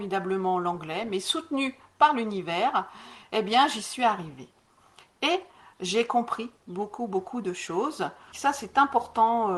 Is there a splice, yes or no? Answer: yes